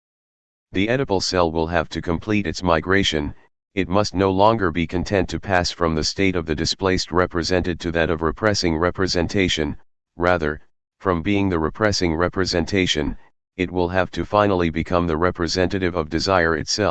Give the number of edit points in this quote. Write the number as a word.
zero